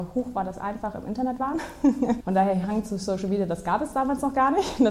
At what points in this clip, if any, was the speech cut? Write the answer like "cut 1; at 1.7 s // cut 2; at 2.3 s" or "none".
cut 1; at 2.2 s